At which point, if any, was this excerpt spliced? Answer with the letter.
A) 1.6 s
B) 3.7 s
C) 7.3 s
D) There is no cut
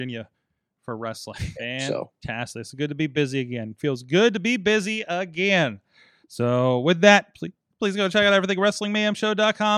A